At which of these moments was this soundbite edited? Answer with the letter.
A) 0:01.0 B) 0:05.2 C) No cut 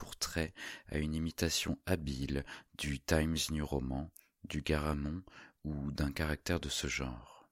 C